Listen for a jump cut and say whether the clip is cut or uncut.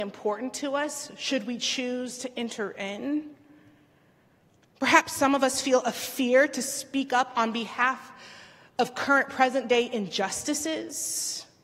uncut